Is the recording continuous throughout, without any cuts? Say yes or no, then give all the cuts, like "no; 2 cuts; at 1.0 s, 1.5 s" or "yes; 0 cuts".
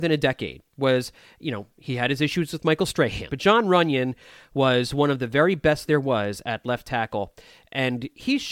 no; 1 cut; at 3.3 s